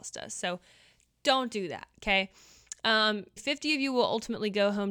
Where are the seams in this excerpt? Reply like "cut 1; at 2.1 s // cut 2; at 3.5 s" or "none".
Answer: cut 1; at 3.4 s